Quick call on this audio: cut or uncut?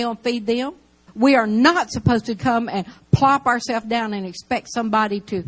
cut